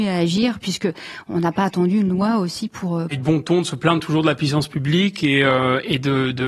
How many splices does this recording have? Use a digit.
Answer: 1